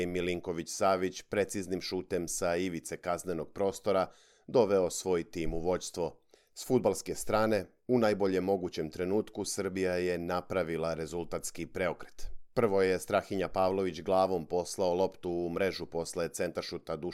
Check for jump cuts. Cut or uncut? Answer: cut